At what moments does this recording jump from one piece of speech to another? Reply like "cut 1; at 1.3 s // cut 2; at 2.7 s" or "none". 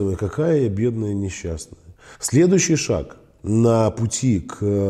cut 1; at 2.1 s